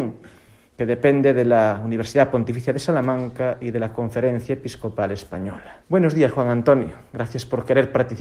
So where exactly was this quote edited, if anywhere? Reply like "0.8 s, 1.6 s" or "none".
5.8 s